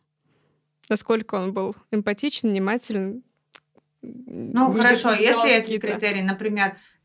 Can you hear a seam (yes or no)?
no